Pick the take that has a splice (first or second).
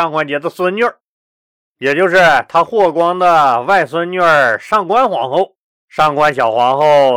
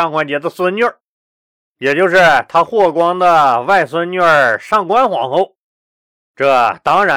first